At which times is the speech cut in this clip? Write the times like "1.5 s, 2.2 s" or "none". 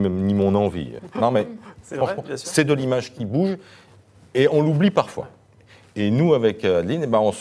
1.0 s

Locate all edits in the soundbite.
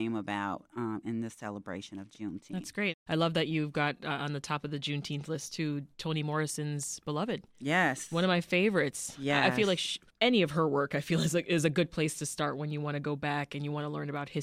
none

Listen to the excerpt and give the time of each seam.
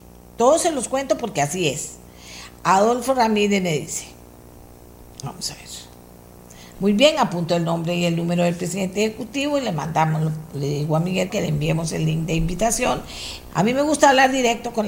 6.7 s, 11.3 s, 13.5 s

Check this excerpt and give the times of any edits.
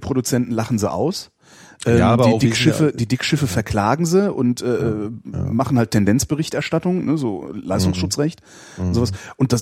none

